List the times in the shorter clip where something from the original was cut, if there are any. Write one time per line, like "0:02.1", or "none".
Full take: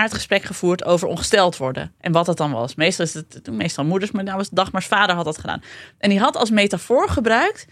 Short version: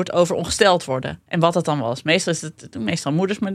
none